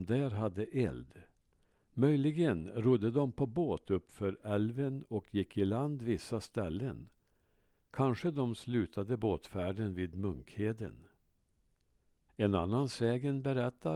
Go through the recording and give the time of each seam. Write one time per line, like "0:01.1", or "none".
0:12.3